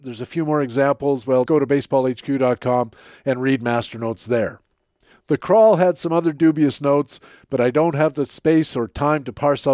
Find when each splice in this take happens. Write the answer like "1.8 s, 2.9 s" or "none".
1.5 s, 5.1 s